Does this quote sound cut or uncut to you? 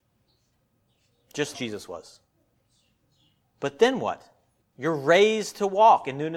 cut